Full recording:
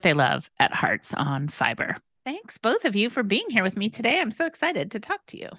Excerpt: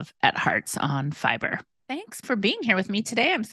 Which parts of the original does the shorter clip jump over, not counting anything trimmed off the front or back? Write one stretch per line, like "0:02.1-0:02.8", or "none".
0:02.6-0:03.1